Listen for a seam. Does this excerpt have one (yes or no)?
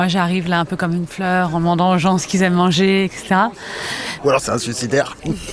yes